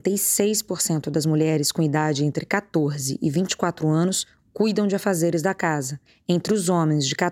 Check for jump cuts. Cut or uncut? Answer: uncut